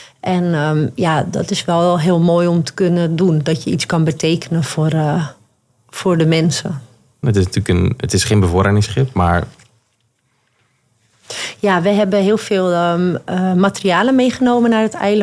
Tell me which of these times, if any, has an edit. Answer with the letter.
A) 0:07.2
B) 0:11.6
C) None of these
A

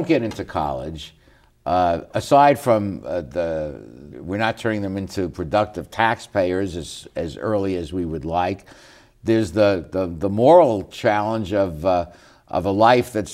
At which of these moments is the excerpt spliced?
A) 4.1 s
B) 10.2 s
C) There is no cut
A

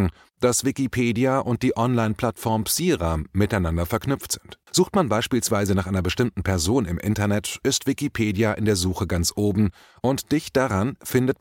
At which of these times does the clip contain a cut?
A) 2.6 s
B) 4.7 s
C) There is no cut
B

